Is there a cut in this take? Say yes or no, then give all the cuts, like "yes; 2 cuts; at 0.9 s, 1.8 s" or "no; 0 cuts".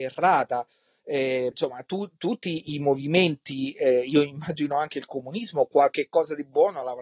yes; 1 cut; at 1.5 s